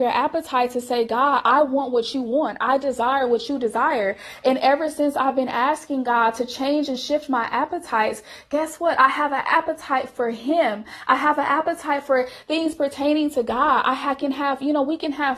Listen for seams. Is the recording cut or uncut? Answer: uncut